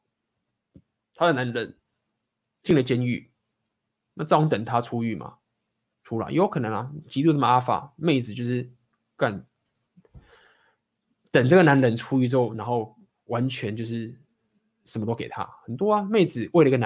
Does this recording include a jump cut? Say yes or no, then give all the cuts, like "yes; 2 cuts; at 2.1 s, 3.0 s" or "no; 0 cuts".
no; 0 cuts